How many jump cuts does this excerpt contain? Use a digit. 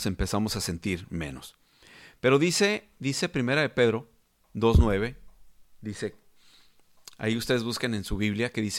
0